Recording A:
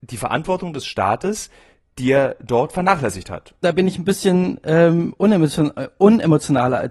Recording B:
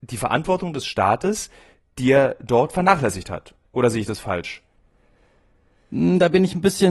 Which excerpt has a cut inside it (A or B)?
A